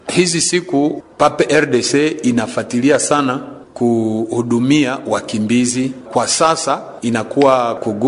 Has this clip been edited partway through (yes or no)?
yes